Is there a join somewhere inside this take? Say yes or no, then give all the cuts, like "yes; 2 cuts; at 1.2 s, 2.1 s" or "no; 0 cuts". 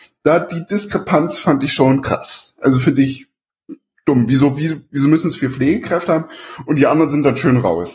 no; 0 cuts